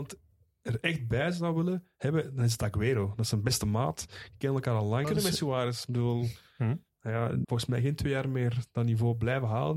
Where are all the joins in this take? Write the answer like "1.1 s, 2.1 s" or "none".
5.0 s, 7.4 s